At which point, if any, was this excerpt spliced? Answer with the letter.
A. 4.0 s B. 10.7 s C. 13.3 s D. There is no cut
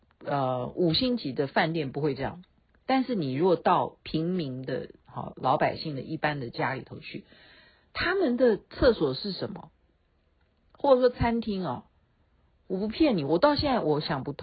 A